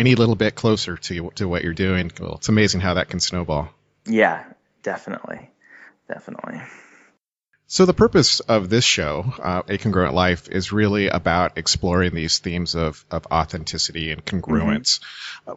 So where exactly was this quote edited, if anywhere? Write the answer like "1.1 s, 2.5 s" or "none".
none